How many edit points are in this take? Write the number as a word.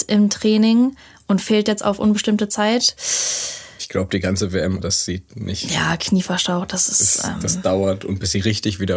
one